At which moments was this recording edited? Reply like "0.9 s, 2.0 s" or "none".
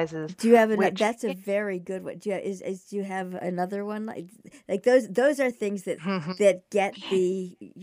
none